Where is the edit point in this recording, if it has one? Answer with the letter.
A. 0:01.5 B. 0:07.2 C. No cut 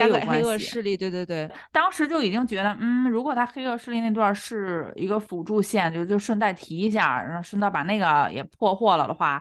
A